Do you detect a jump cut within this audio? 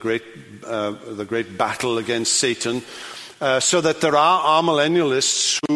no; 0 cuts

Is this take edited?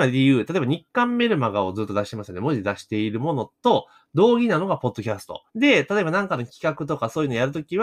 yes; 1 cut; at 5.5 s

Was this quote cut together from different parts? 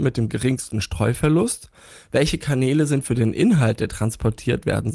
no; 0 cuts

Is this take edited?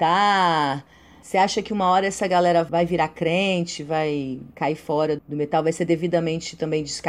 yes; 1 cut; at 5.2 s

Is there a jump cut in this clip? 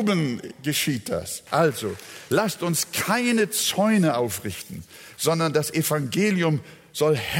yes; 1 cut; at 1.5 s

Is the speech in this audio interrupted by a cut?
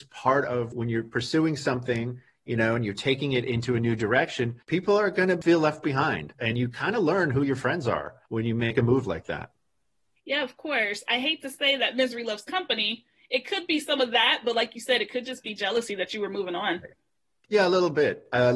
yes; 1 cut; at 6.3 s

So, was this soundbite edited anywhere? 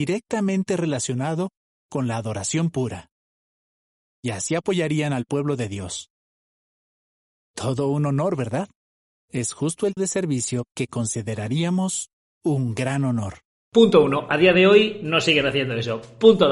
yes; 1 cut; at 10.0 s

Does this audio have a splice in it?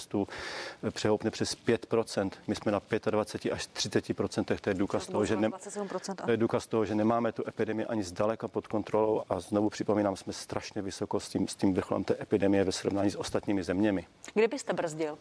yes; 1 cut; at 9.2 s

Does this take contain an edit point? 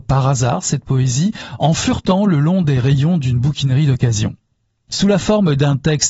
yes; 1 cut; at 4.9 s

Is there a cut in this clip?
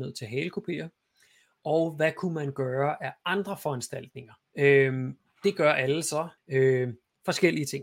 yes; 2 cuts; at 4.5 s, 6.4 s

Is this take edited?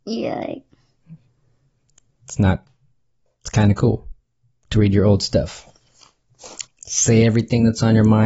yes; 1 cut; at 6.6 s

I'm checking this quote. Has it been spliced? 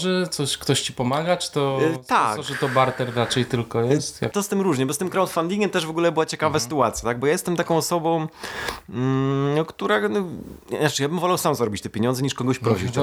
yes; 1 cut; at 4.3 s

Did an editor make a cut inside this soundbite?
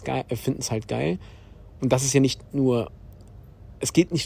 no; 0 cuts

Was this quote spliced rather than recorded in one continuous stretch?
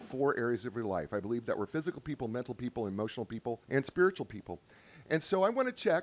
yes; 1 cut; at 3.6 s

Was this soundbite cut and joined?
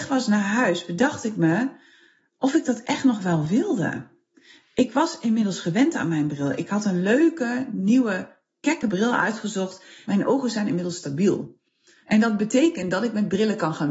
yes; 2 cuts; at 10.0 s, 12.0 s

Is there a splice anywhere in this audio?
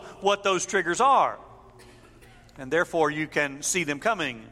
no; 0 cuts

